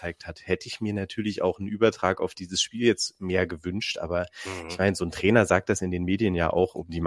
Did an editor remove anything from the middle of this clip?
no; 0 cuts

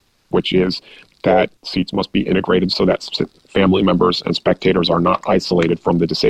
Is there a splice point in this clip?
yes; 1 cut; at 1.6 s

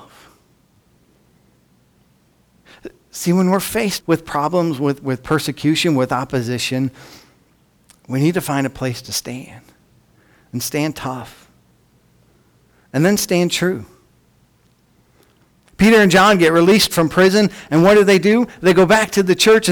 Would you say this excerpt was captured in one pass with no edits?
no; 1 cut; at 4.0 s

